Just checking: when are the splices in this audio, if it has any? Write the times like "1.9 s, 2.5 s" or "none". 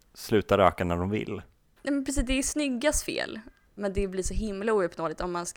1.8 s, 3.7 s